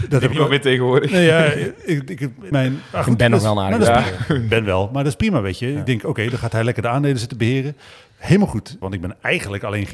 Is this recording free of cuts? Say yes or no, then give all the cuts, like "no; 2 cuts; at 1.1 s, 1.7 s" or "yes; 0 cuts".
no; 2 cuts; at 2.5 s, 8.8 s